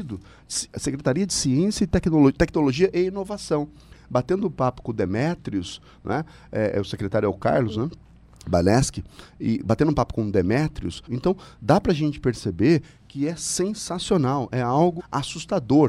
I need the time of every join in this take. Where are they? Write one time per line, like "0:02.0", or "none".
0:11.1
0:15.0